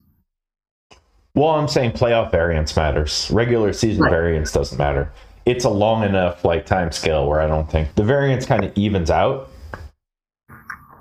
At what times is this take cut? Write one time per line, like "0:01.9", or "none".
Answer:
0:07.9